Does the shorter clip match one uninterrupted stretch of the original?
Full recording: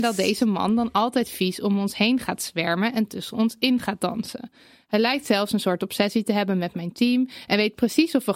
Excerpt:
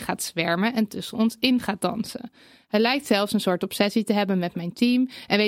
yes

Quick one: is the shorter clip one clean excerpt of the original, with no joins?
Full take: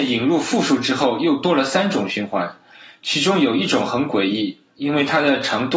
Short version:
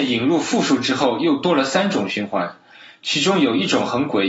yes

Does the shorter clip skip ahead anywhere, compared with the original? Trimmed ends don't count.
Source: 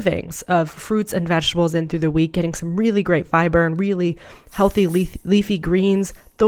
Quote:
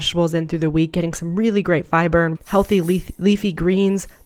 yes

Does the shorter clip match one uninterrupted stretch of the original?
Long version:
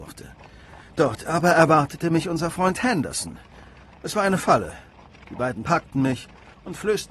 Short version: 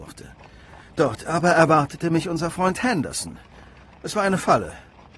yes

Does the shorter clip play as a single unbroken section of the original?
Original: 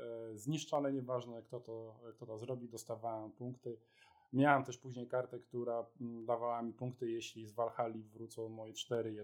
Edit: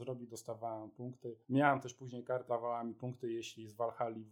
no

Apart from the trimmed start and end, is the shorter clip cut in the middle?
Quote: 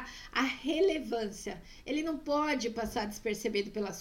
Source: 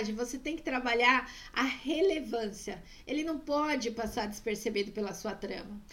no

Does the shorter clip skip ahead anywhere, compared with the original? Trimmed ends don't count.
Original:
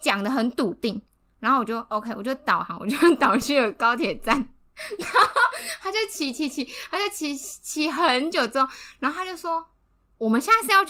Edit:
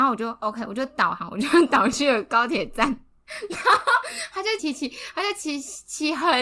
yes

